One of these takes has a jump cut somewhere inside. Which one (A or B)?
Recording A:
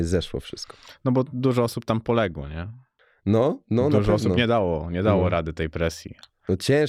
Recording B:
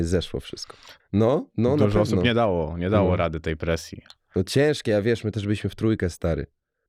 B